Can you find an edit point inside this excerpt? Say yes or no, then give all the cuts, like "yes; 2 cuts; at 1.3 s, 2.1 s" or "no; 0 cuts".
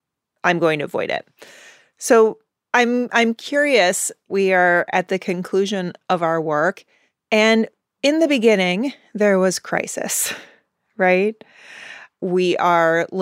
no; 0 cuts